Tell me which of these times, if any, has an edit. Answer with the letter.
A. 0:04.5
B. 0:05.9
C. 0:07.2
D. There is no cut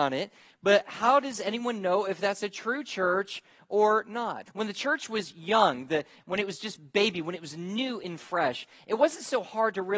A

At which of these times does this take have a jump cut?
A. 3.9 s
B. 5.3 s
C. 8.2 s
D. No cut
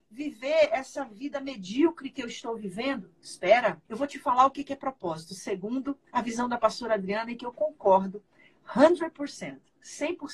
A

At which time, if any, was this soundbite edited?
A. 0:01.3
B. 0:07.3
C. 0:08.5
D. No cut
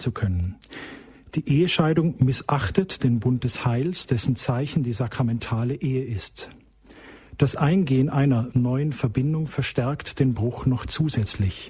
C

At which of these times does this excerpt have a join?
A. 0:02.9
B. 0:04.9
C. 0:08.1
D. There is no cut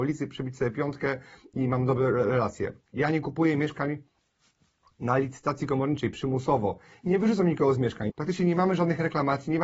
C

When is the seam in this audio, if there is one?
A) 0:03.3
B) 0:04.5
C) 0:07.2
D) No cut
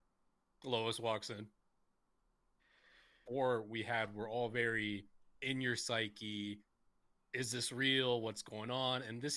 A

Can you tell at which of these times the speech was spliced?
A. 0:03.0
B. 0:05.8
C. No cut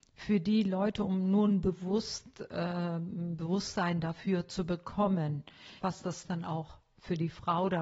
B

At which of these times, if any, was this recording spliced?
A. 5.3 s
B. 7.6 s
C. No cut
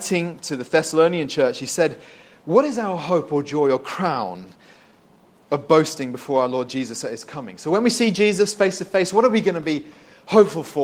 C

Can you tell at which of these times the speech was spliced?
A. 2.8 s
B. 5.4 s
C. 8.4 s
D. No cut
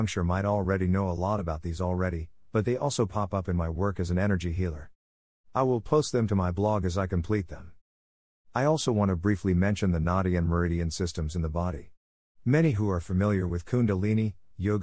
B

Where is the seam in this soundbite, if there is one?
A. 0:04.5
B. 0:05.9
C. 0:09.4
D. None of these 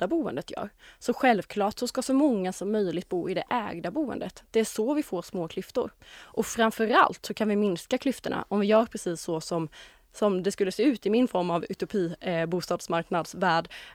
D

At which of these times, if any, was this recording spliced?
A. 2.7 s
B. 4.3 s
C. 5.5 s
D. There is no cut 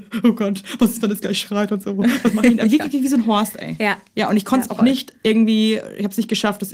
D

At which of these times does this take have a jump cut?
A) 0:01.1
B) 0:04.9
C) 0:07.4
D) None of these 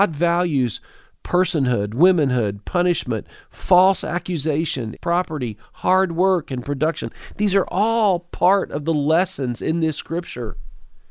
B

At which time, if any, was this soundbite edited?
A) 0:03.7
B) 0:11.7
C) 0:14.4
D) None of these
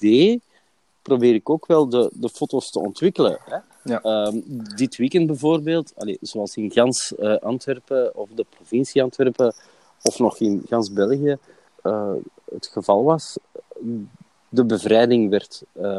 B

